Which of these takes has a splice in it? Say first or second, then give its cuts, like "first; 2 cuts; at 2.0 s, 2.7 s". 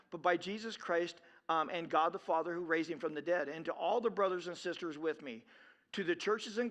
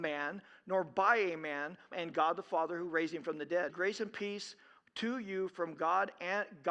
second; 2 cuts; at 1.9 s, 3.7 s